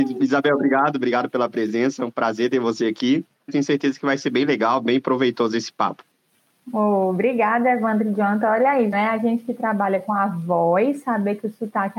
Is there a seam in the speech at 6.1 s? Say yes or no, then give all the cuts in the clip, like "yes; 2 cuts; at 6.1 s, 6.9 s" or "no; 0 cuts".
no; 2 cuts; at 3.5 s, 8.9 s